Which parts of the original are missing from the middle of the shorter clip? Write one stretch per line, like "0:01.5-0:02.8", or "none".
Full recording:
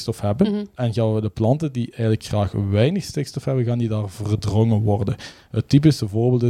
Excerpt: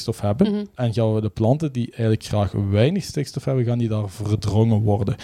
none